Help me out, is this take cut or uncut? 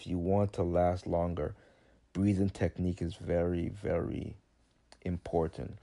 uncut